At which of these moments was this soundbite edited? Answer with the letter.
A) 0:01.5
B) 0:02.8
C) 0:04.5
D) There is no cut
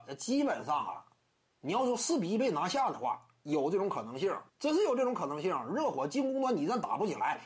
C